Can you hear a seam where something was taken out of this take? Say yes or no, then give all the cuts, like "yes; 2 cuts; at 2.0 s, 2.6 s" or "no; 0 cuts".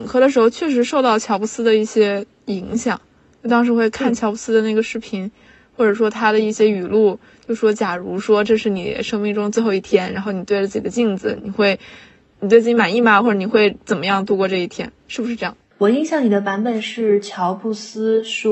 no; 0 cuts